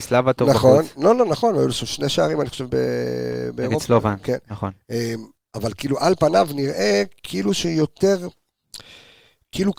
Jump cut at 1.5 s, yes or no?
no